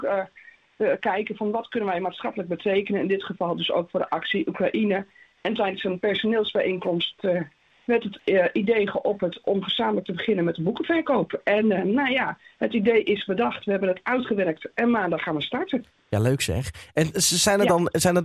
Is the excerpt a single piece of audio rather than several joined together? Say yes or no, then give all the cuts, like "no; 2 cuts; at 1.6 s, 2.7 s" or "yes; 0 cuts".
yes; 0 cuts